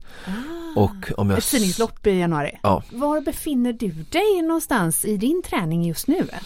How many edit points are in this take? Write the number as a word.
two